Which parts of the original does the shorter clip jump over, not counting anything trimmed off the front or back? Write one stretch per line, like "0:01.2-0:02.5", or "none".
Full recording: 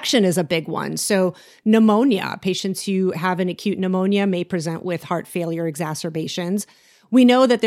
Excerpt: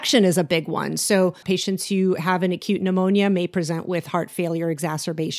0:01.4-0:02.4